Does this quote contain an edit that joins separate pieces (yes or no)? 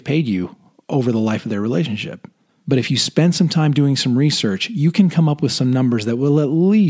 yes